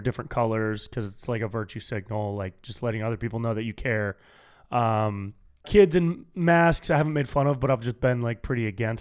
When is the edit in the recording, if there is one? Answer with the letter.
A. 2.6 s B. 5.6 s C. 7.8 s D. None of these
B